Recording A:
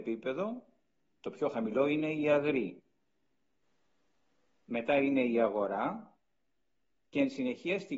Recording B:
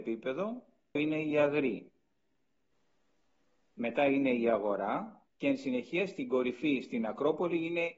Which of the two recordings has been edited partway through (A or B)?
B